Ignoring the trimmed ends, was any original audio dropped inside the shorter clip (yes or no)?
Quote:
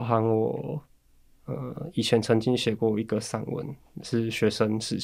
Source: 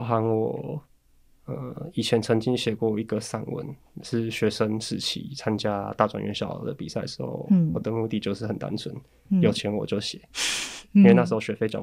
no